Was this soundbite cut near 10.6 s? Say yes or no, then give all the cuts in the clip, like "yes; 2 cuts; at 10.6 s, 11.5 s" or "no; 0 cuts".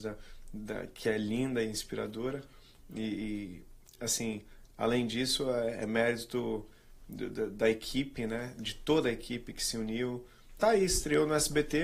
yes; 1 cut; at 10.6 s